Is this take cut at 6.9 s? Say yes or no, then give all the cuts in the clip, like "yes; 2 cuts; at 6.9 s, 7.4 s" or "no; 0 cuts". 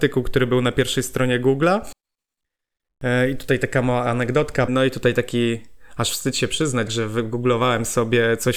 yes; 2 cuts; at 4.7 s, 6.9 s